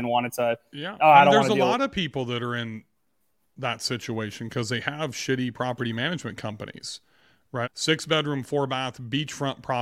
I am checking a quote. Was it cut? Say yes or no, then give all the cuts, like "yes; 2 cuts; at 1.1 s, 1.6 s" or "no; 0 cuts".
yes; 1 cut; at 7.6 s